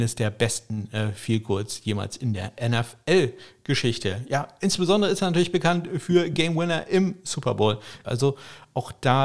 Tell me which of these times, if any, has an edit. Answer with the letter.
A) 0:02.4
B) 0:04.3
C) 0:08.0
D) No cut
C